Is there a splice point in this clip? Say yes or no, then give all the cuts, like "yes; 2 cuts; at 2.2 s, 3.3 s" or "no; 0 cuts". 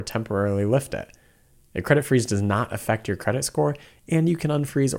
no; 0 cuts